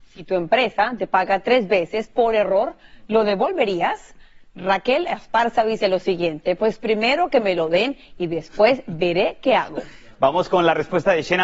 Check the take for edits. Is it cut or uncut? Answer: uncut